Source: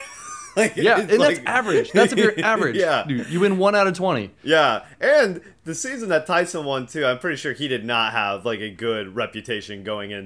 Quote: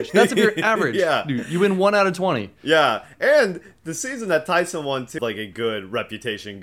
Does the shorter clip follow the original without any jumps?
no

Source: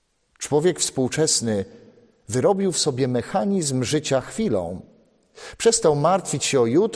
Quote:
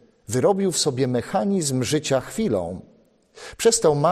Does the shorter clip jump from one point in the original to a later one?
no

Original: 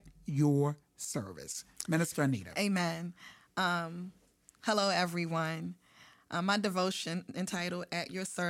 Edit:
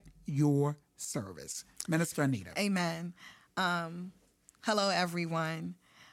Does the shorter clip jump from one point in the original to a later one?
no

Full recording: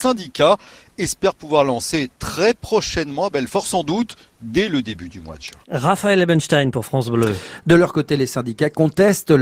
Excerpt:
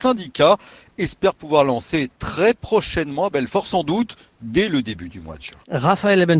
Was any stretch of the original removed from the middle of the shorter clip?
no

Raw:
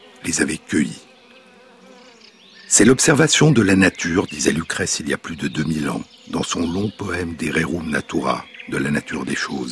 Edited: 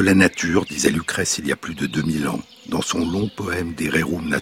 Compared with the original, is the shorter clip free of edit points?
yes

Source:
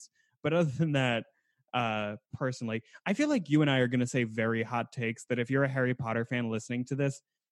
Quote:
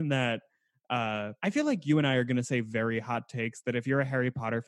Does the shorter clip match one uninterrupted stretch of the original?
no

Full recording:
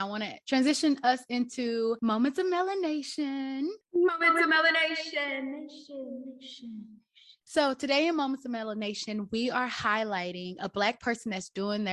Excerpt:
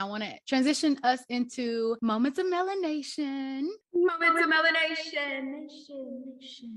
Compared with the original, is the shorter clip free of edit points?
yes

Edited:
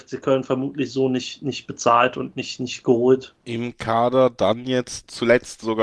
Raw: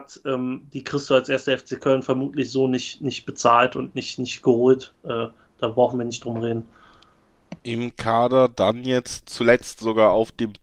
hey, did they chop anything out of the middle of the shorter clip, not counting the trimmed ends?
yes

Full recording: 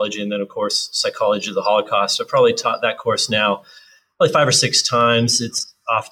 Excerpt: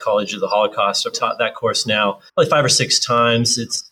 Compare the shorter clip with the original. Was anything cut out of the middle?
yes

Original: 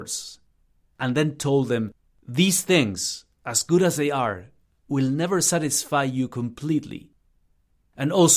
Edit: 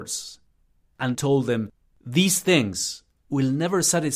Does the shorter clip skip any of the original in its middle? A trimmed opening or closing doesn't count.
yes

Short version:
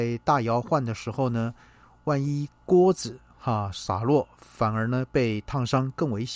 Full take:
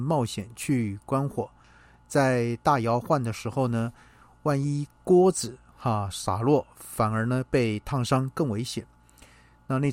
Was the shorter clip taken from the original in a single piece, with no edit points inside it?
yes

